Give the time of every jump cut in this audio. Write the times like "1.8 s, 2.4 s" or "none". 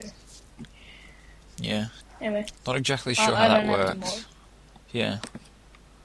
1.4 s, 2.5 s